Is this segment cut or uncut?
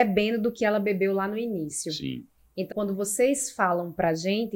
cut